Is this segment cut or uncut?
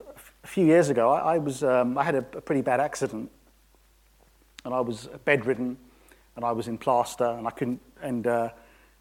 uncut